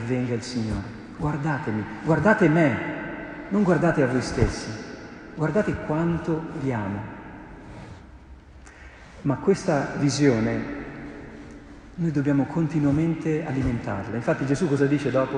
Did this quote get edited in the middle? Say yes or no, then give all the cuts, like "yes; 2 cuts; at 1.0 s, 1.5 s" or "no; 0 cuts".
no; 0 cuts